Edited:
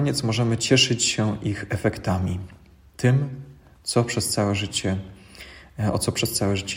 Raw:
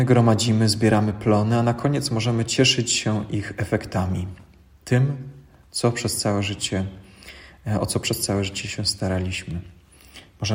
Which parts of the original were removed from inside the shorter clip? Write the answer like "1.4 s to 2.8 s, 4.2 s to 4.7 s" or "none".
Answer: none